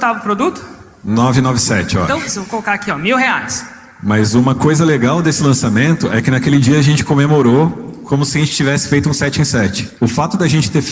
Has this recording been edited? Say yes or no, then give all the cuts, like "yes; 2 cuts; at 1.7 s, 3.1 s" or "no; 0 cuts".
yes; 1 cut; at 10.0 s